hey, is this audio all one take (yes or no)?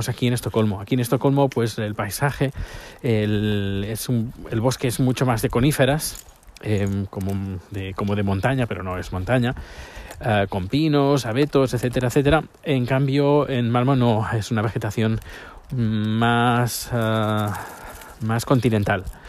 yes